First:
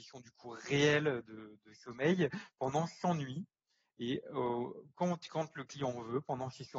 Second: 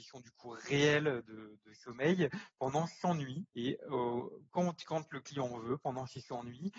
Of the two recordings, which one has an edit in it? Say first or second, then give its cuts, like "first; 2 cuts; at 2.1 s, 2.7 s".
second; 1 cut; at 3.5 s